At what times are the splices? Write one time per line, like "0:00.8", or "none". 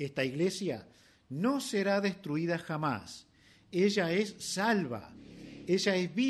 none